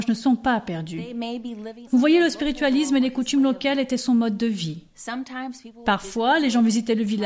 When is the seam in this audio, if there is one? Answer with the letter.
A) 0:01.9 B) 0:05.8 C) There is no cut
A